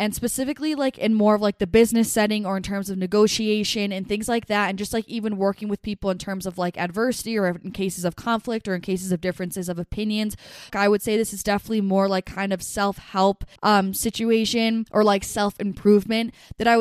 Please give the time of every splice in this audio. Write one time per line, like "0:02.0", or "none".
0:10.7
0:13.6